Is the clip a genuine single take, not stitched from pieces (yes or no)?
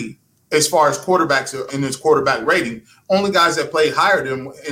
no